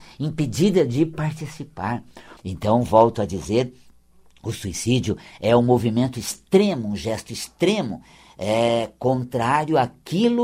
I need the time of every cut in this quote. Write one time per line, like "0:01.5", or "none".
0:02.4